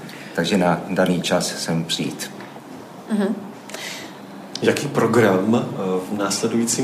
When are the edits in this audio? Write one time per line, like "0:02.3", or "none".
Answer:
none